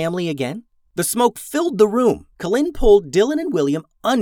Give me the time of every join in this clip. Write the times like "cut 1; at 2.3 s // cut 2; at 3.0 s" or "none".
cut 1; at 0.9 s // cut 2; at 2.3 s